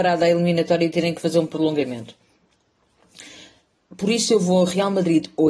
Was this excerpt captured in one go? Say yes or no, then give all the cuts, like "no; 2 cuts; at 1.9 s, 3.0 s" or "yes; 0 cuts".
yes; 0 cuts